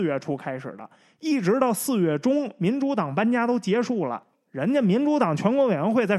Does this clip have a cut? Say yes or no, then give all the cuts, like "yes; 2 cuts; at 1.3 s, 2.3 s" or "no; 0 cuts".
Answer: yes; 1 cut; at 4.3 s